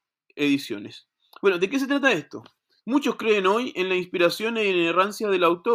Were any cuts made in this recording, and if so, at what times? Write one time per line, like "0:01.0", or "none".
0:02.8